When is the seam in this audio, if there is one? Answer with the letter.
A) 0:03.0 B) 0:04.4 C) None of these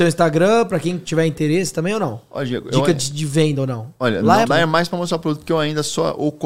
B